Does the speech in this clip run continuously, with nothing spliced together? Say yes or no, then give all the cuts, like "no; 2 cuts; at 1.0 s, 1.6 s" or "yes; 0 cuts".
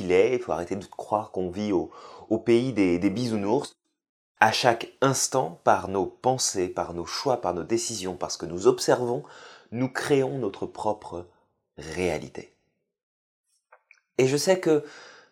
no; 1 cut; at 4.4 s